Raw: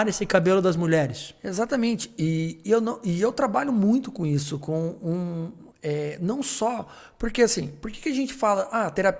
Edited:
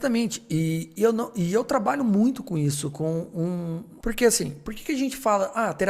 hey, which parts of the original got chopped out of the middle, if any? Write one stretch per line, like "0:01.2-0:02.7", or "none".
0:05.7-0:07.2